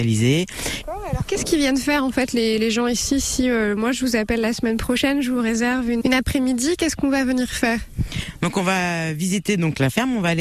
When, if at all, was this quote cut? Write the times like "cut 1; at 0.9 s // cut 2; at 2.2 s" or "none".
cut 1; at 6.0 s